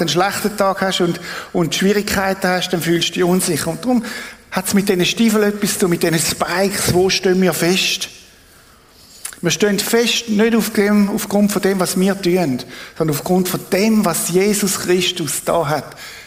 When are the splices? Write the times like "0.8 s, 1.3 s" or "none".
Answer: none